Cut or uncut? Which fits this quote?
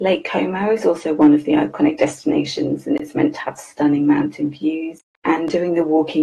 cut